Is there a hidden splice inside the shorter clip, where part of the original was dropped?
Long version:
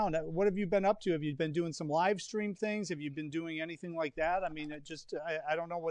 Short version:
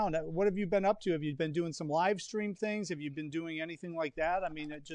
no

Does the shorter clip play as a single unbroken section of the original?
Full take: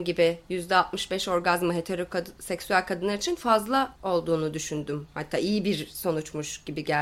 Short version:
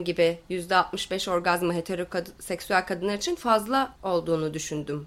yes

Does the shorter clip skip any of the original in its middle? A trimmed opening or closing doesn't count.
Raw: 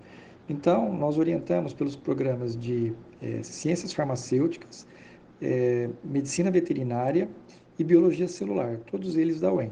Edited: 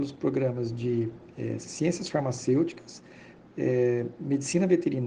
no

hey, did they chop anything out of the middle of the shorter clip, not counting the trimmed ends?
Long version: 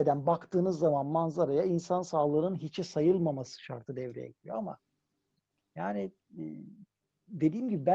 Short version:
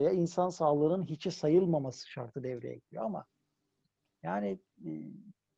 no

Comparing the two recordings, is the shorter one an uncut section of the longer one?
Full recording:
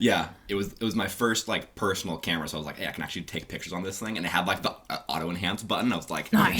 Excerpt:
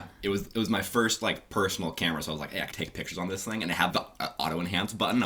no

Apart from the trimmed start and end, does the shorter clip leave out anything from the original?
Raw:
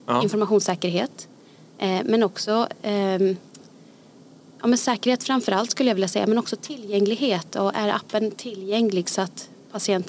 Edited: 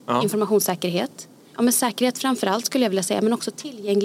yes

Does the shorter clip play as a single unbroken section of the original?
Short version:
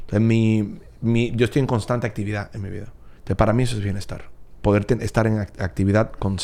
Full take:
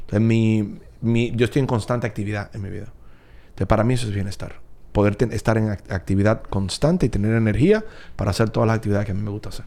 no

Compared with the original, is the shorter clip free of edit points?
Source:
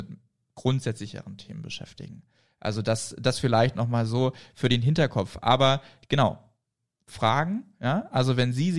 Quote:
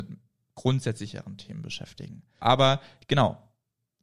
no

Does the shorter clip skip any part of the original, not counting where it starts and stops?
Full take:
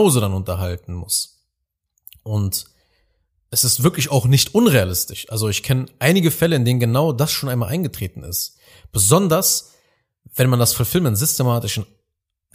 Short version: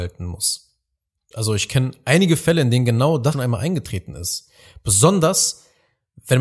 yes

